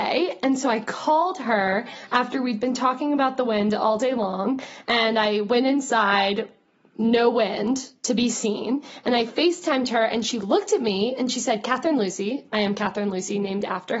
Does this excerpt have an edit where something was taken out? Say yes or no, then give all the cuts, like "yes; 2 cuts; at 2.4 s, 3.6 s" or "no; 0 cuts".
no; 0 cuts